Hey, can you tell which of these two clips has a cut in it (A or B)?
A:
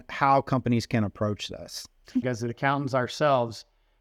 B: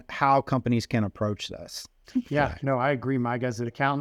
A